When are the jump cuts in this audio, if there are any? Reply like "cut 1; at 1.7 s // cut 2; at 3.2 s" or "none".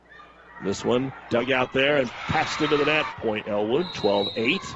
cut 1; at 1.3 s // cut 2; at 3.1 s